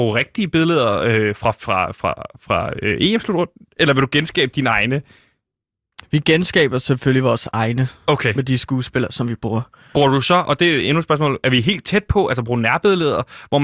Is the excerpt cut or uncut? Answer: uncut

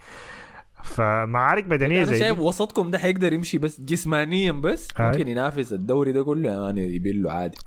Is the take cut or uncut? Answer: uncut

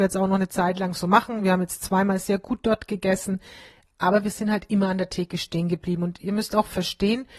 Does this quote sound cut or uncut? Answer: uncut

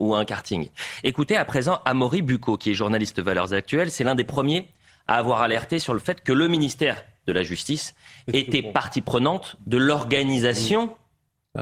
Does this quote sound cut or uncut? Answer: uncut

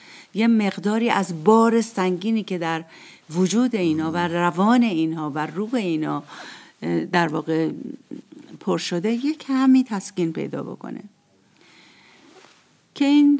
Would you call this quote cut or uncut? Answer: uncut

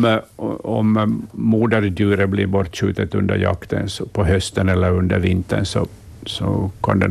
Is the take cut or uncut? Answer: uncut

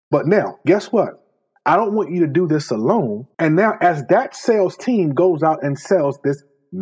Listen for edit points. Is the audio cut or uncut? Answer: cut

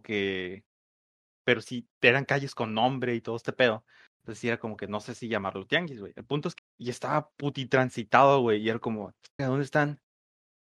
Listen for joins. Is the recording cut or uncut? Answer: cut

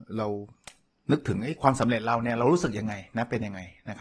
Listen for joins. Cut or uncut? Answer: uncut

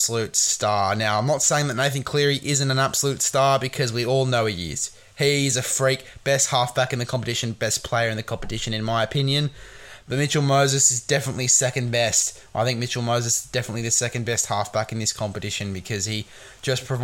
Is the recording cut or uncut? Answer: uncut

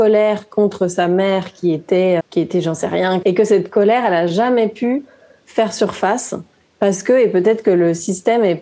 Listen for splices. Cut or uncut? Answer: cut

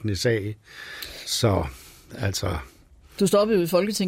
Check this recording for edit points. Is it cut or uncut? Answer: uncut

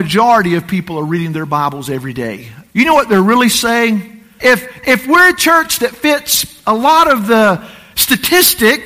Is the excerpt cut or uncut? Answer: cut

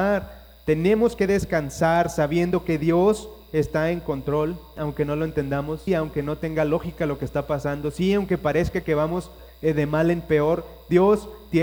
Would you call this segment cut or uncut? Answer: cut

